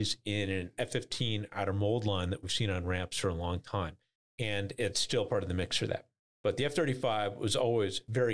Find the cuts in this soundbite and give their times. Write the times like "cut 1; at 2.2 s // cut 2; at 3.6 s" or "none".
cut 1; at 4.2 s // cut 2; at 6.3 s